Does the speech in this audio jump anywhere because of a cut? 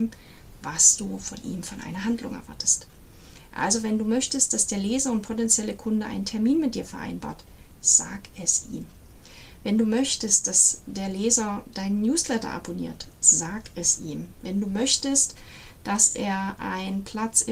no; 0 cuts

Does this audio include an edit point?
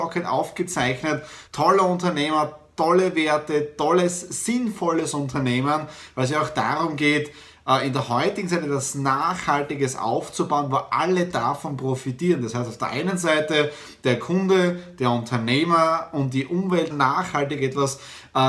yes; 2 cuts; at 1.5 s, 16.9 s

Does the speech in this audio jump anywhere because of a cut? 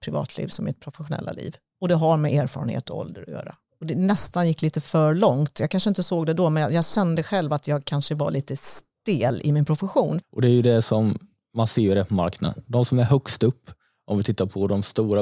yes; 2 cuts; at 3.7 s, 10.2 s

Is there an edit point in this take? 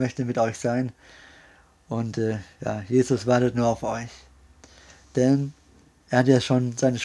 no; 0 cuts

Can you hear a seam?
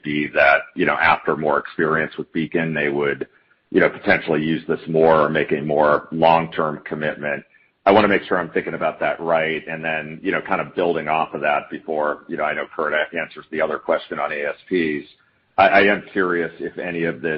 no; 0 cuts

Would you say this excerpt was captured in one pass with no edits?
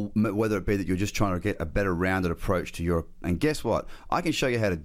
no; 1 cut; at 3.2 s

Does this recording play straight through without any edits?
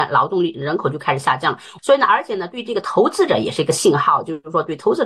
no; 1 cut; at 1.8 s

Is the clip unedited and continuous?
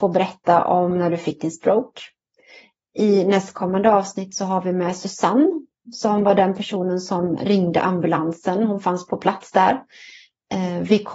yes; 0 cuts

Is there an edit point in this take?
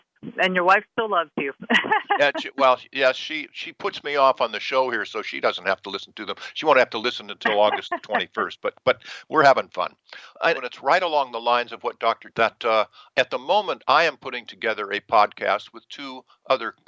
yes; 2 cuts; at 10.5 s, 12.3 s

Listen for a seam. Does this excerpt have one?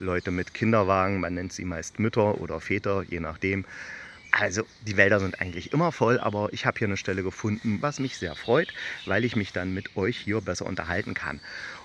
yes; 2 cuts; at 4.3 s, 7.8 s

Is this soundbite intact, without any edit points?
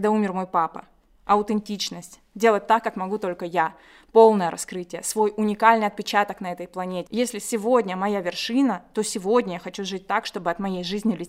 no; 1 cut; at 7.1 s

